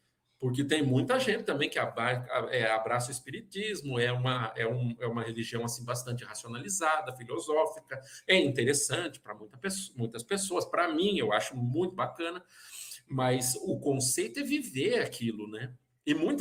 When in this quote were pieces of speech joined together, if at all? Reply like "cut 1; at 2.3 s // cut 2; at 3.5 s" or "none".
none